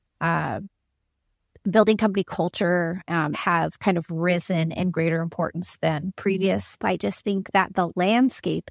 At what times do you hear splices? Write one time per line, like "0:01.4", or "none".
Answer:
0:03.3
0:06.8